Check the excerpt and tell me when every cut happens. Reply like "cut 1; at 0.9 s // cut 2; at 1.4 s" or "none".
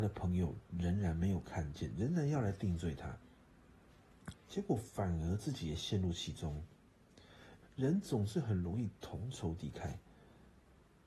cut 1; at 4.3 s // cut 2; at 7.6 s

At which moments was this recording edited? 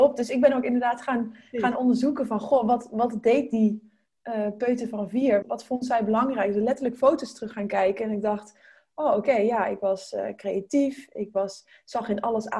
cut 1; at 5.4 s

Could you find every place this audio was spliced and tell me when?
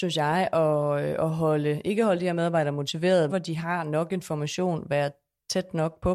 cut 1; at 3.3 s

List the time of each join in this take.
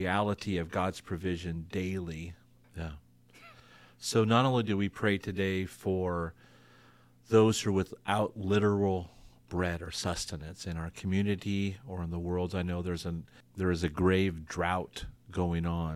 cut 1; at 2.6 s

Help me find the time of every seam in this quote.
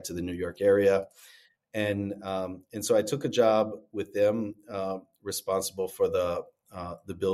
none

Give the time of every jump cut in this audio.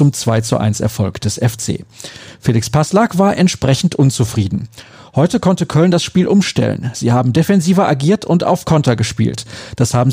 none

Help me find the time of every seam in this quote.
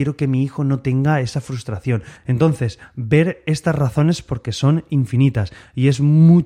cut 1; at 2.2 s

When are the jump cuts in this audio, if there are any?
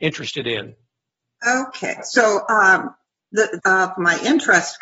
cut 1; at 3.6 s

